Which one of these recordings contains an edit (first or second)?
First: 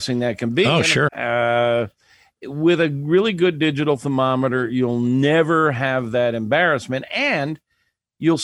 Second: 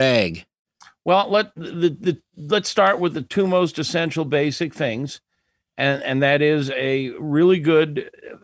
first